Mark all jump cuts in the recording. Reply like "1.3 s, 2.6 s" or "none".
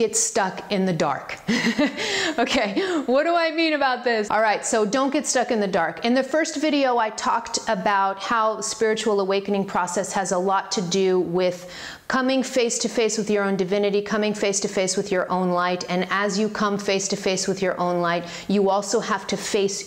4.3 s